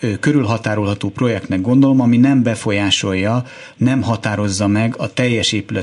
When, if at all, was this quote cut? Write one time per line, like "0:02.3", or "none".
none